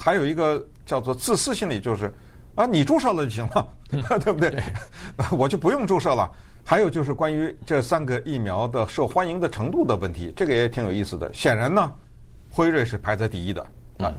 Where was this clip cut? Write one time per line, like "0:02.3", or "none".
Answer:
0:06.5